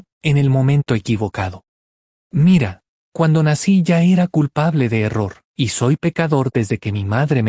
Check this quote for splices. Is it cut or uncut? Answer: cut